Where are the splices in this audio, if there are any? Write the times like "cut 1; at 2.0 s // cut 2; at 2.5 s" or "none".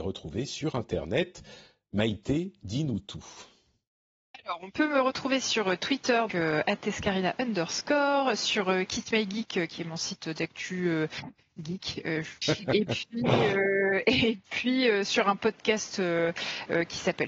cut 1; at 6.3 s // cut 2; at 12.4 s